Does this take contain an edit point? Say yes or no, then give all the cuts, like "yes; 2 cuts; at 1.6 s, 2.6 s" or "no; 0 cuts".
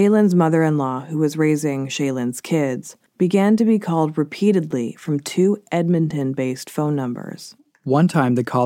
yes; 1 cut; at 3.1 s